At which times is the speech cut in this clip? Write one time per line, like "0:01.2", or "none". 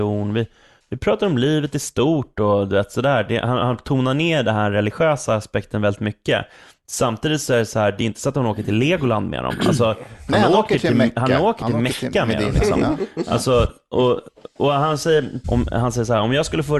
0:15.4